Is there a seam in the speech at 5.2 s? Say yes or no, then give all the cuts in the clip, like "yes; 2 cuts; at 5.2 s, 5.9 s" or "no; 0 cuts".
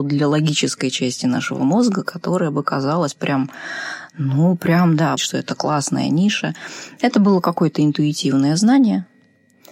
yes; 1 cut; at 5.2 s